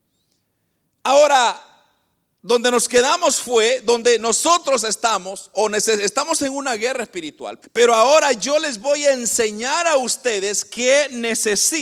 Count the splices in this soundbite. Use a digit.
1